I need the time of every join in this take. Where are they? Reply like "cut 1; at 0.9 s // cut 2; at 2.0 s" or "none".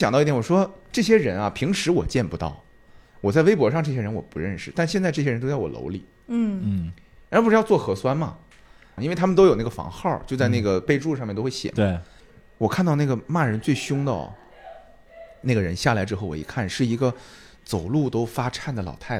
cut 1; at 9.0 s